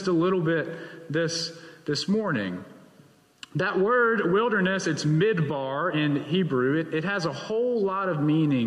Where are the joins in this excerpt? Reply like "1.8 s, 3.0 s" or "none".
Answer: none